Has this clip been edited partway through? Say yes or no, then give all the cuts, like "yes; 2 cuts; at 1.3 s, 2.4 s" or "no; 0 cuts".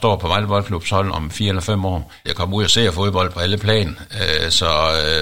yes; 1 cut; at 2.2 s